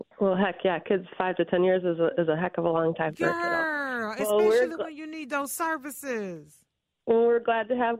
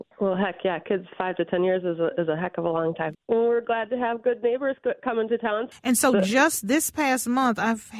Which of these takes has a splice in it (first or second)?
second